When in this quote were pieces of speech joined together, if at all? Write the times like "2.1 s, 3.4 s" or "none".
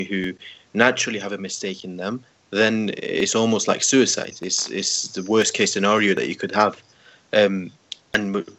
none